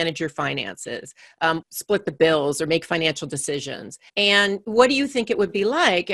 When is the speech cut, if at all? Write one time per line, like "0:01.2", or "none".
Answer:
0:01.6
0:04.1